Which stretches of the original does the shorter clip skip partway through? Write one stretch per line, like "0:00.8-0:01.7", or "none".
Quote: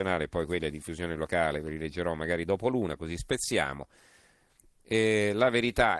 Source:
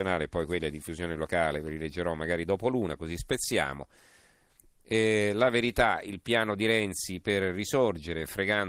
none